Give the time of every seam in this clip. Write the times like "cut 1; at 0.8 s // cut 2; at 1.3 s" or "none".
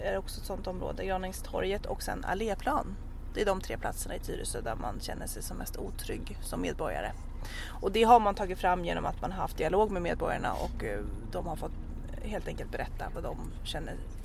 none